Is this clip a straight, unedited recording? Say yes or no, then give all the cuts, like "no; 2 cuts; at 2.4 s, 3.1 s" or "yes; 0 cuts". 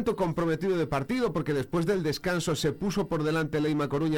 yes; 0 cuts